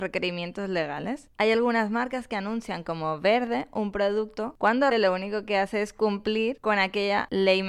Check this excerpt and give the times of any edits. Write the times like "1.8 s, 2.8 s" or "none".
4.9 s

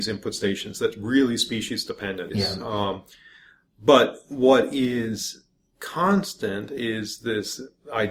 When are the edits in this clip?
2.3 s

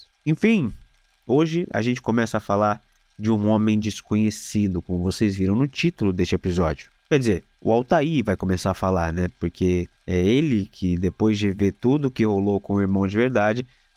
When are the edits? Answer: none

